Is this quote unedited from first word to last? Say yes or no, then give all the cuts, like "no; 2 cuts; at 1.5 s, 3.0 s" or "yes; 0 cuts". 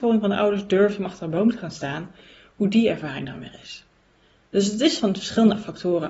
yes; 0 cuts